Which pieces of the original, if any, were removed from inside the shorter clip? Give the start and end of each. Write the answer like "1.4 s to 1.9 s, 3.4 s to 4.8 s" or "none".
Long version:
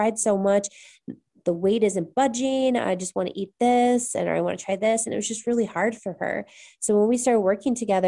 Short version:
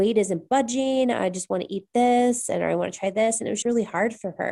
5.3 s to 5.4 s